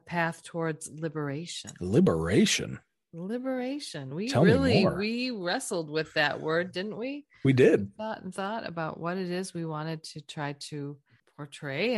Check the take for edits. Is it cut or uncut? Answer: uncut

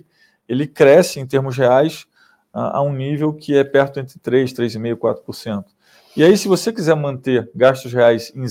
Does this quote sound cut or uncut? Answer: uncut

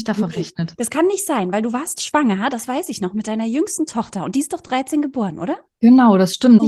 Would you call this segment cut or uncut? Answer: uncut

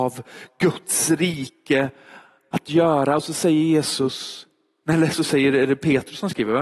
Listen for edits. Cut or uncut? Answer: uncut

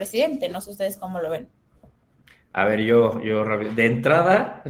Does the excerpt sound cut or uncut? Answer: uncut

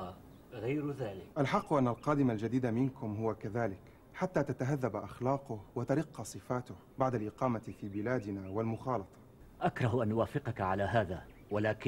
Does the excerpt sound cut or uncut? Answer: cut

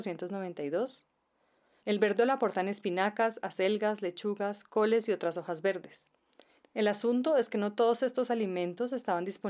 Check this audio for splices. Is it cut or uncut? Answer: cut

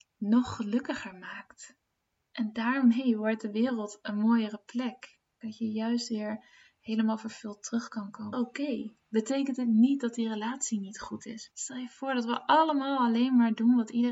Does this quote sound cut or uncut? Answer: cut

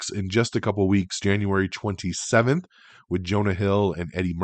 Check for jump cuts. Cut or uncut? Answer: uncut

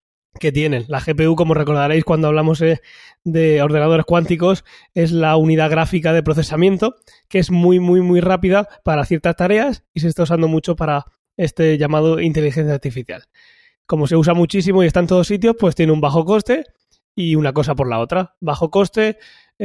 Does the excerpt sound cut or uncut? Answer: uncut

